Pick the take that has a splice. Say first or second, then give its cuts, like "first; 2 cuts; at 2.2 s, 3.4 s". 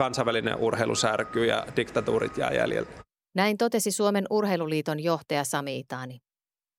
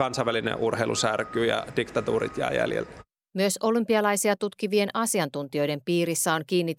second; 1 cut; at 3.2 s